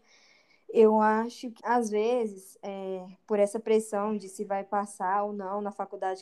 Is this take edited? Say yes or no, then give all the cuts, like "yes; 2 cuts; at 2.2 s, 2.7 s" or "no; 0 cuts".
yes; 1 cut; at 1.6 s